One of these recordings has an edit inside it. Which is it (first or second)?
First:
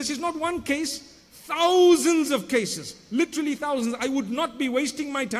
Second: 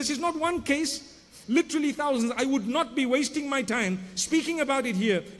second